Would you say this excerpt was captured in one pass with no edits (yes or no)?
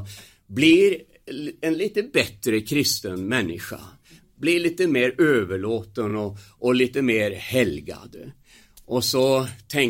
yes